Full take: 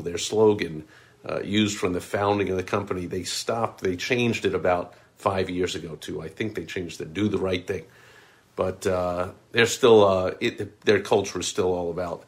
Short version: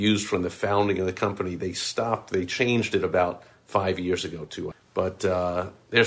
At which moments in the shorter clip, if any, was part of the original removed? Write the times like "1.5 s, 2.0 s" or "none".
4.7 s